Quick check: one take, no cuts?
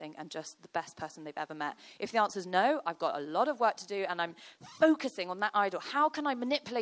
yes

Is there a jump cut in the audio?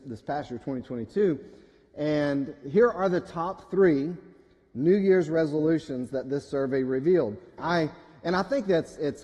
yes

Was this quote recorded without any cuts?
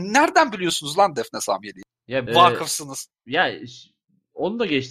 no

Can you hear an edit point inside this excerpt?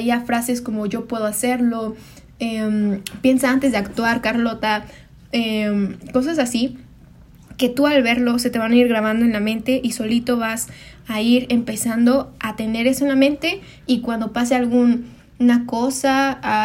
no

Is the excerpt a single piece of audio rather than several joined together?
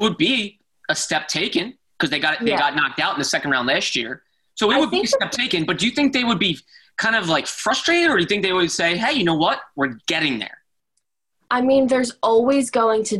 yes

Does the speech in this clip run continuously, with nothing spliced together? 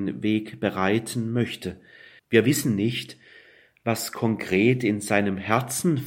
no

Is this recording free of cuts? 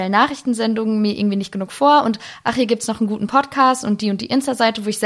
yes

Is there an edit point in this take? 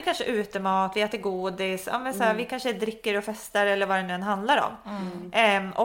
no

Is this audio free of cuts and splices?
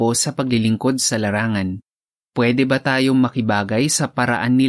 no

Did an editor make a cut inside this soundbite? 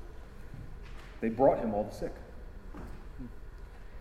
yes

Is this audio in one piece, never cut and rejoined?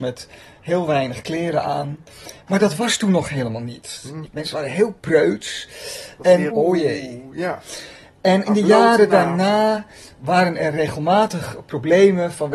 no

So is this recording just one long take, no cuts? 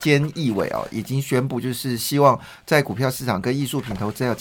yes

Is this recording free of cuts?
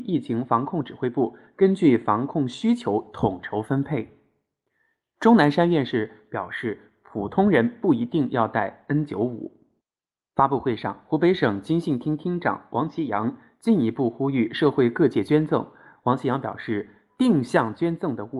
no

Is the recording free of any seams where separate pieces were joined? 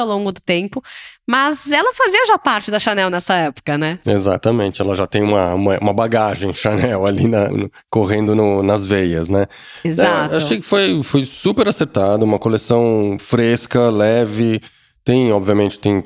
no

